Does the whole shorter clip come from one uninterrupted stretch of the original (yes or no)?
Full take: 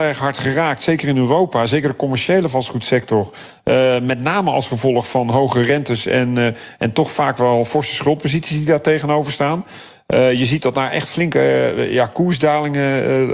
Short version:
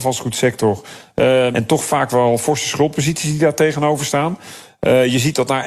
no